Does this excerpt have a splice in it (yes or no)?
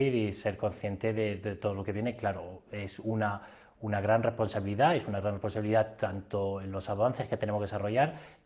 no